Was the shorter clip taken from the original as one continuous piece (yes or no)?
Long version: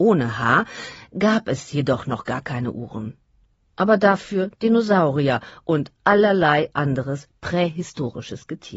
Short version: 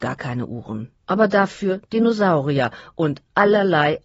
no